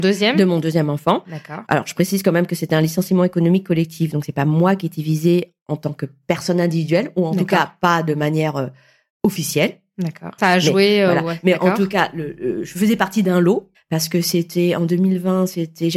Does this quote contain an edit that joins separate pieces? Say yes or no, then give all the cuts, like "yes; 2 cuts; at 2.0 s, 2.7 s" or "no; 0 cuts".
yes; 2 cuts; at 10.4 s, 13.7 s